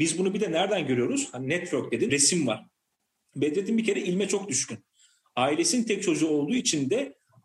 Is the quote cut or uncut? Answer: cut